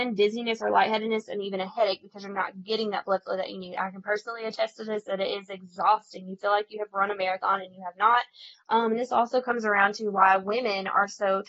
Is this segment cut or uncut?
cut